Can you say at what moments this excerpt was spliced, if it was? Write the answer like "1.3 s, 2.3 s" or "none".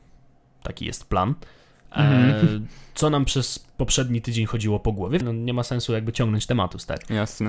5.2 s